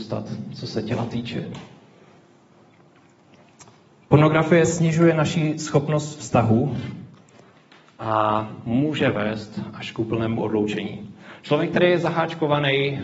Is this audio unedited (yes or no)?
yes